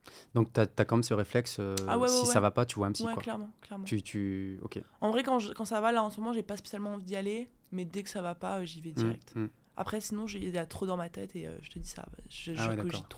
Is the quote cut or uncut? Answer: uncut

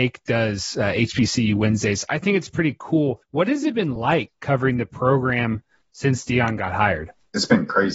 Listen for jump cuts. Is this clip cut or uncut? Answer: uncut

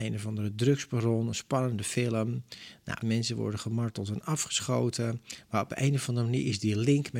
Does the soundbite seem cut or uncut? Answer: cut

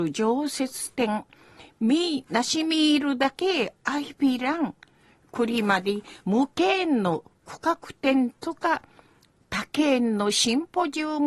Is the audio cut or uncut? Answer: uncut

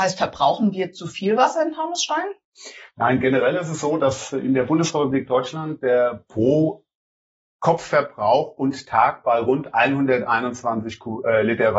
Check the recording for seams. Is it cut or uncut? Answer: uncut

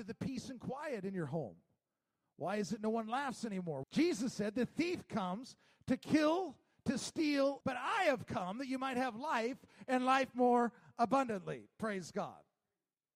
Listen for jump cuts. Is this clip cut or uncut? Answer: cut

